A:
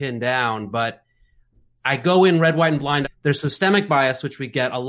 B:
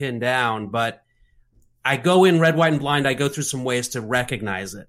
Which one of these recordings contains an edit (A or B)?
A